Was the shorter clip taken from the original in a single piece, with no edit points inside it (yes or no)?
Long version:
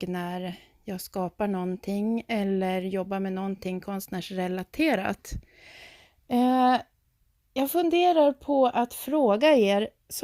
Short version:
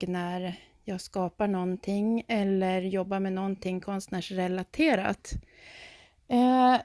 yes